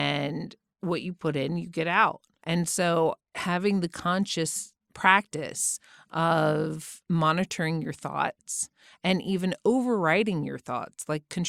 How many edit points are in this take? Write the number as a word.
zero